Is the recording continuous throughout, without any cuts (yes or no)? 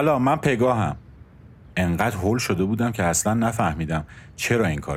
yes